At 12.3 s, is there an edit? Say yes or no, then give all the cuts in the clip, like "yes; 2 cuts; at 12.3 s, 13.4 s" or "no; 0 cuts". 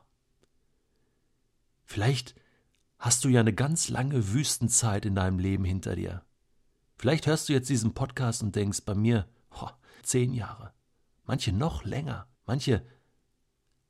yes; 2 cuts; at 10.0 s, 12.3 s